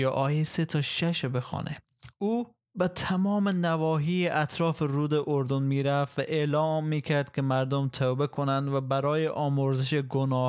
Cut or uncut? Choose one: uncut